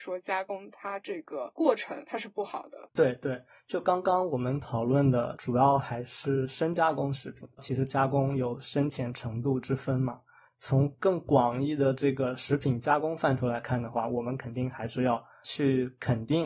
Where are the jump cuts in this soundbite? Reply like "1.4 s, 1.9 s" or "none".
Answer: 7.6 s